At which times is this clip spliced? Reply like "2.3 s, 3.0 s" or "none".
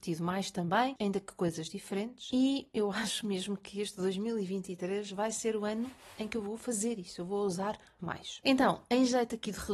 1.0 s, 8.0 s

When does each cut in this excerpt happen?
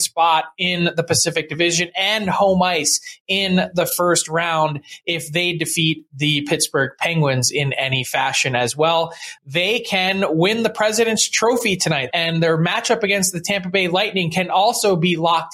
9.4 s, 12.1 s

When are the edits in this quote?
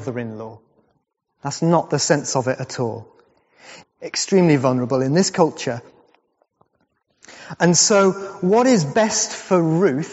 3.8 s

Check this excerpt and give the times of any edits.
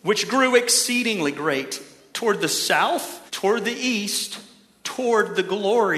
3.3 s

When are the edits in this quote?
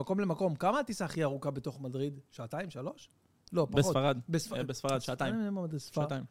none

